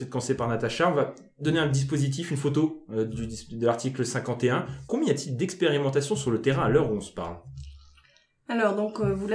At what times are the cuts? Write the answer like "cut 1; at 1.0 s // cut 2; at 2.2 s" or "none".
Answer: cut 1; at 4.9 s

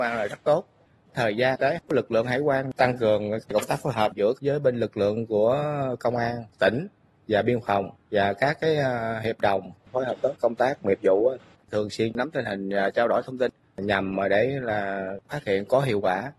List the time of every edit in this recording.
cut 1; at 1.0 s

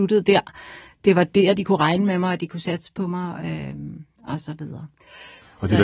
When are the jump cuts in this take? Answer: cut 1; at 1.6 s

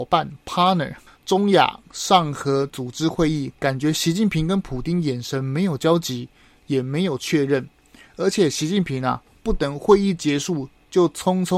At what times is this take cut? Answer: cut 1; at 1.1 s

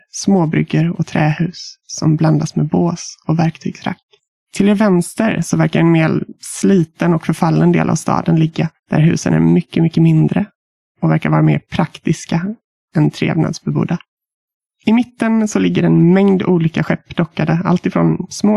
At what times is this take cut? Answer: none

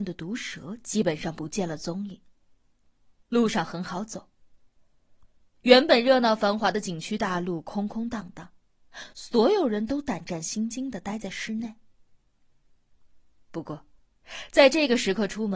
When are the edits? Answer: none

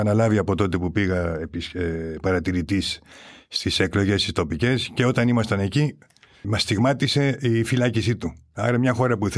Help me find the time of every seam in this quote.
cut 1; at 6.4 s

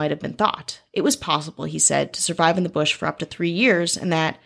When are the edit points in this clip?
none

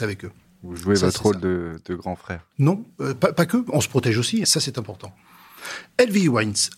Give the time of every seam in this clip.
cut 1; at 2.5 s // cut 2; at 4.4 s

